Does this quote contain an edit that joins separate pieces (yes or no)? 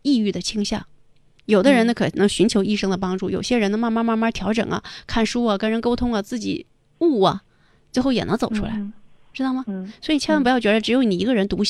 no